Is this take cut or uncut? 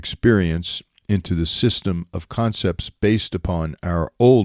uncut